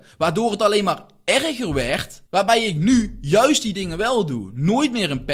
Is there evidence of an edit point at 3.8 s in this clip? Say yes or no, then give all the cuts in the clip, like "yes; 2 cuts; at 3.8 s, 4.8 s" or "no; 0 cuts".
no; 1 cut; at 2.3 s